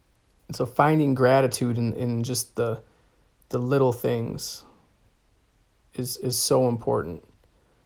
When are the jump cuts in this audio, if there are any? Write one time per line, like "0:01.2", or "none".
none